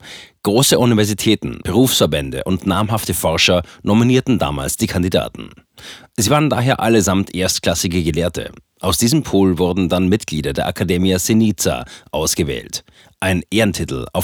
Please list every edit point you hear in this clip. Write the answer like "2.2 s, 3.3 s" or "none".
1.6 s